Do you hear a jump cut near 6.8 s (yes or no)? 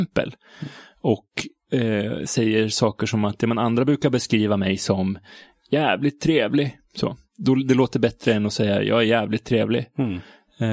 no